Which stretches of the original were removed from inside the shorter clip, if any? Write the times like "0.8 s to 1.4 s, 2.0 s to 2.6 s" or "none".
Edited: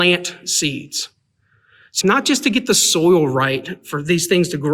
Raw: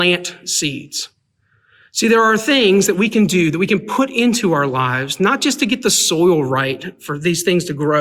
2.0 s to 5.2 s